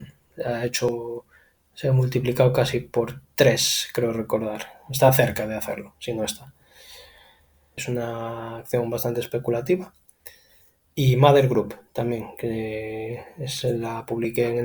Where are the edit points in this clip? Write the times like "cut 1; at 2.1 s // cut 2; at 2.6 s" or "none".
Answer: cut 1; at 7.8 s

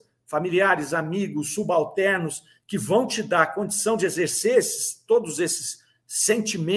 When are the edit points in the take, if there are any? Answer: cut 1; at 1.5 s

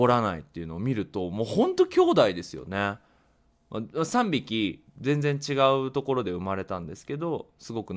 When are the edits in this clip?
none

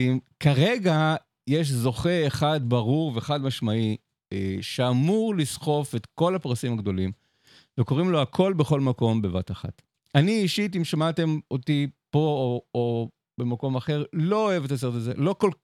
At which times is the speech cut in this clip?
none

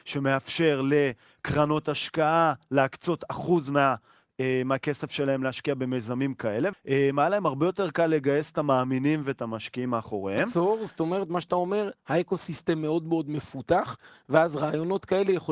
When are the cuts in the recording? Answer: cut 1; at 6.7 s

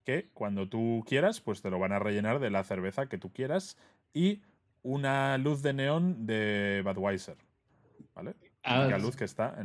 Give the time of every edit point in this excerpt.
none

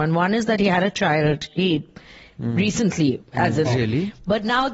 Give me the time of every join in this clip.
cut 1; at 3.6 s

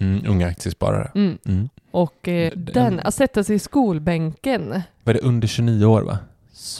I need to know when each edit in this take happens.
cut 1; at 2.5 s

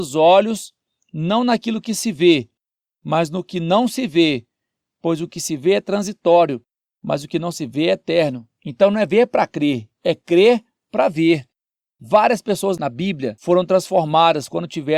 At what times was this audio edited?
none

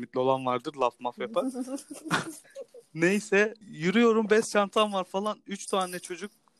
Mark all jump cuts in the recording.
cut 1; at 2.4 s // cut 2; at 3.6 s

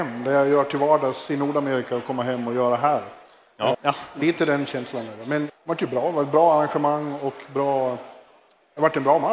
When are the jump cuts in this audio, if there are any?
cut 1; at 3.7 s // cut 2; at 5.5 s

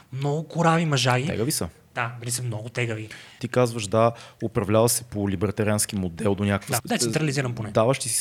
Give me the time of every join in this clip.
cut 1; at 3.4 s // cut 2; at 6.8 s

